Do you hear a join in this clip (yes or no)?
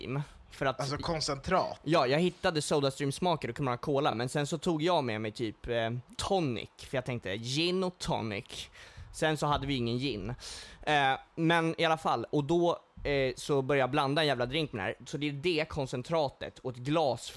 no